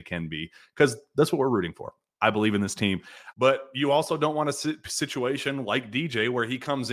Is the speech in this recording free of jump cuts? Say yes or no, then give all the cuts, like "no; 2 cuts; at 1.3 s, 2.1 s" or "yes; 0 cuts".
no; 1 cut; at 3.3 s